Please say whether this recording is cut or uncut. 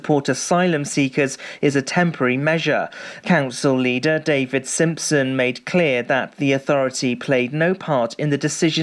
cut